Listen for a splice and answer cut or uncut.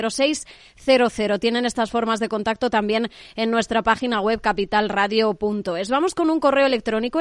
uncut